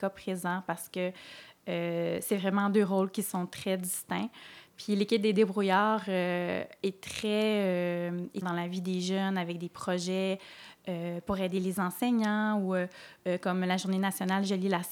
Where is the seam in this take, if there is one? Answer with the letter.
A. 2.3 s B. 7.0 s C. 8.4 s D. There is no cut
C